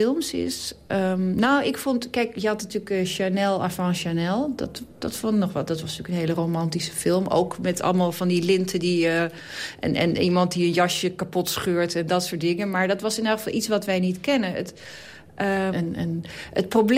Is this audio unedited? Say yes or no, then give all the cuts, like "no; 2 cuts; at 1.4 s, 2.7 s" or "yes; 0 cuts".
no; 1 cut; at 15.7 s